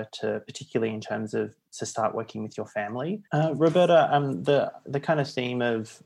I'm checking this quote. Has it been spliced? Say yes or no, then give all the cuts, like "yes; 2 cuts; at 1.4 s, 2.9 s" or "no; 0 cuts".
yes; 1 cut; at 3.3 s